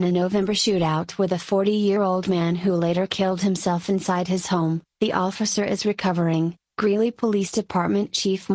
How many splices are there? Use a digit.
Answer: 1